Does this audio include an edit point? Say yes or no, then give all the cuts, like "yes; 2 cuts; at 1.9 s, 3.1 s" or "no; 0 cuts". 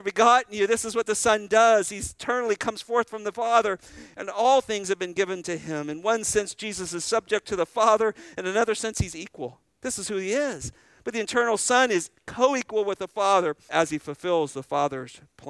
yes; 1 cut; at 13.7 s